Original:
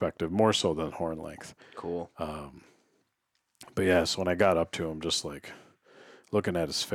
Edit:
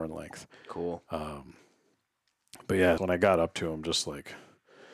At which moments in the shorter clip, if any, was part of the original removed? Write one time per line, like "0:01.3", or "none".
0:03.0